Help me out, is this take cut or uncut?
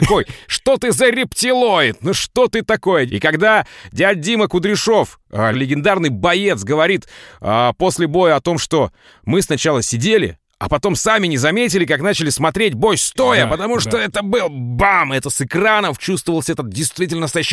cut